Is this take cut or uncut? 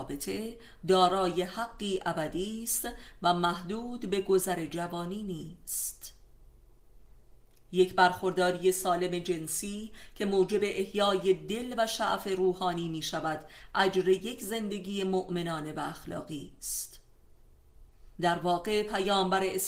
cut